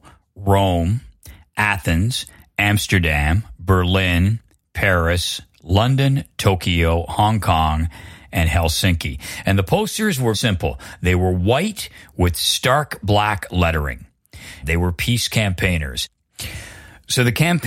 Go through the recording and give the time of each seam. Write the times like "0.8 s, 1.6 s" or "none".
10.3 s, 14.6 s